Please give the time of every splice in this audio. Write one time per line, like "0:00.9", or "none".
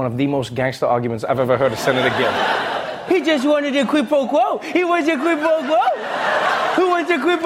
0:03.1